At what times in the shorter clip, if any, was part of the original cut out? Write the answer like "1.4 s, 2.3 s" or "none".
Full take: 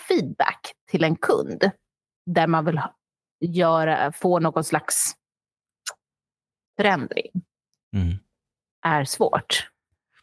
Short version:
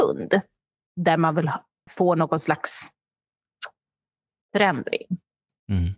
1.9 s